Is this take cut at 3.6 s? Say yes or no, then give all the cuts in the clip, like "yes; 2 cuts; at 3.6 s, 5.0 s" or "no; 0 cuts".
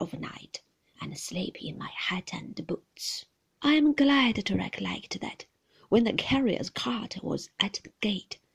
yes; 1 cut; at 3.6 s